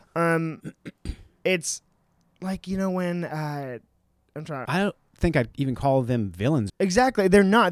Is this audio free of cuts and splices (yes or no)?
no